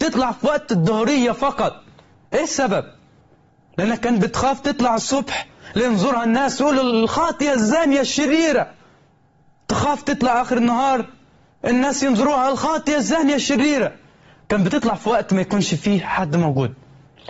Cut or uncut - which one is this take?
uncut